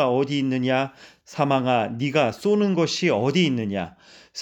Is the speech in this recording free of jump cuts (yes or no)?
yes